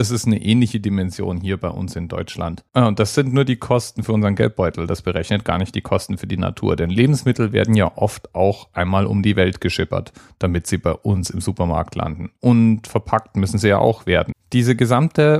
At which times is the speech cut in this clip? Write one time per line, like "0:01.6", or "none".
0:02.7
0:14.3